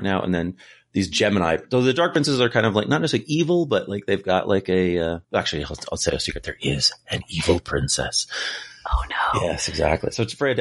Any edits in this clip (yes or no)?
yes